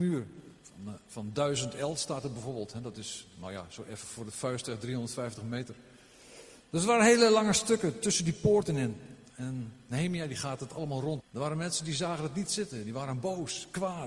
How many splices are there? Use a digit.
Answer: 1